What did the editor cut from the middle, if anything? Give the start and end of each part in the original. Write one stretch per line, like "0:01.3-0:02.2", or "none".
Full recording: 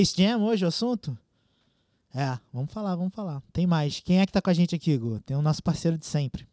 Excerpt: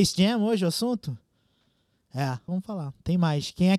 0:02.5-0:03.0